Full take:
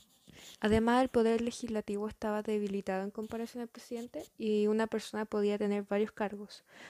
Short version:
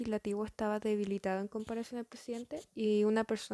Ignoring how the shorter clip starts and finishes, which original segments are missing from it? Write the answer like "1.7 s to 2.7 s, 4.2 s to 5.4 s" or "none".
none

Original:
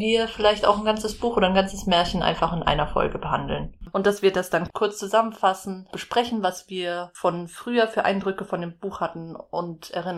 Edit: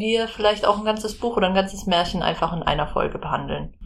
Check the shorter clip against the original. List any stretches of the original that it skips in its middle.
none

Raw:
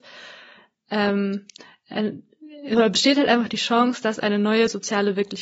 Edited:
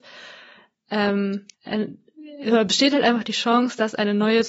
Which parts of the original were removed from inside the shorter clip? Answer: 1.5 s to 1.8 s

